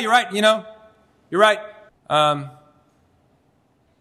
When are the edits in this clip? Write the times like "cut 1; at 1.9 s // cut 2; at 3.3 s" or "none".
cut 1; at 1.9 s